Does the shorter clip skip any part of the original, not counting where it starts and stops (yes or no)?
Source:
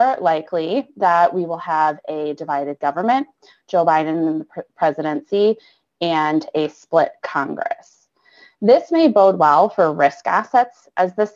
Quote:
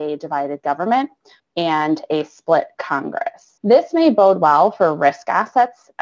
yes